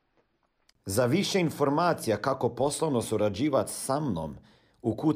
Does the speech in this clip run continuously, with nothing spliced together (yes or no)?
yes